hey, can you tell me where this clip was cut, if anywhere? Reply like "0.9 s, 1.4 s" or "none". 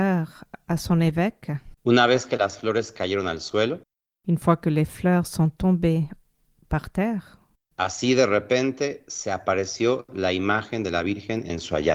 1.7 s, 7.5 s